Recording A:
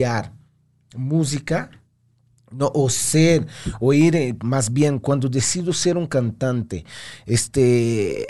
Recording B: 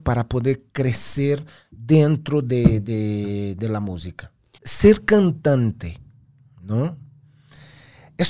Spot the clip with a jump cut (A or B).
B